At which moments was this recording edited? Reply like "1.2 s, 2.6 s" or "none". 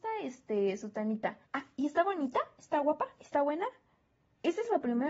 1.5 s